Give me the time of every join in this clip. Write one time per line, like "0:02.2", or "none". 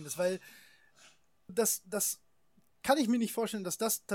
0:01.5